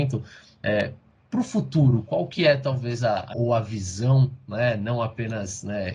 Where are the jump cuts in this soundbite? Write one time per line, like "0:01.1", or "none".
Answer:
0:03.3